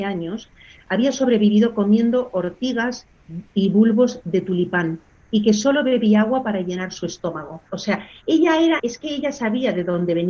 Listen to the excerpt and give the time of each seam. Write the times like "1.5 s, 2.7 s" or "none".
7.7 s, 8.8 s